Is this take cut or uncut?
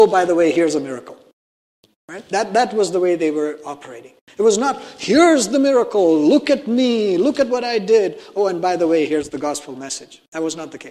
uncut